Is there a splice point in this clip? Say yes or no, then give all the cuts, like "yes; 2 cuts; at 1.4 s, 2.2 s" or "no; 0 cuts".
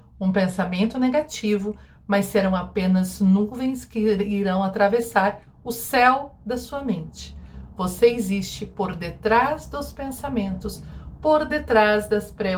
no; 0 cuts